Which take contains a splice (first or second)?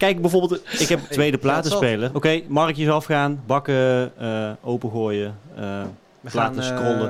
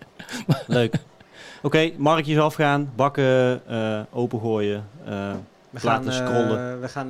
first